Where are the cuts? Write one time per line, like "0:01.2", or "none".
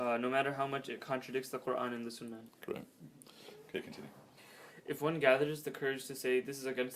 0:02.5